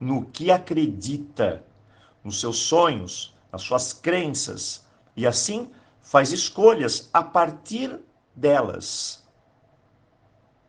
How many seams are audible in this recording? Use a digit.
0